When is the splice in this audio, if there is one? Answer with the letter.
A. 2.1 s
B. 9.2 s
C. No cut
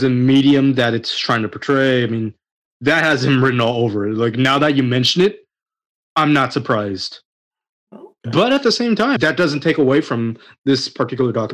B